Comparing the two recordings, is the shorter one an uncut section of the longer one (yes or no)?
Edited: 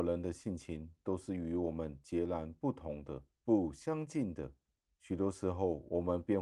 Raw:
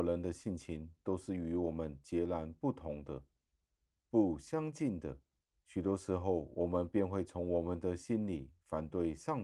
no